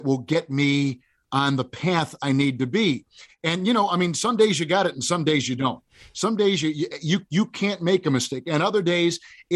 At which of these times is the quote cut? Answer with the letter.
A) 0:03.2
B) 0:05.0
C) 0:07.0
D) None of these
D